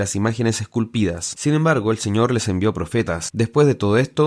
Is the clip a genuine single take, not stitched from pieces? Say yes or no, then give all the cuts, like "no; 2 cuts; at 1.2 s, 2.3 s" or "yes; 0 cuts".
no; 2 cuts; at 1.3 s, 3.3 s